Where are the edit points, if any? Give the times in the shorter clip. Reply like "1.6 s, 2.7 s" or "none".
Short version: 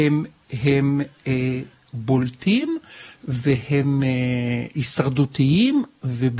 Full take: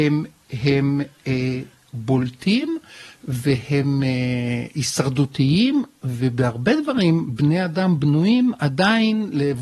none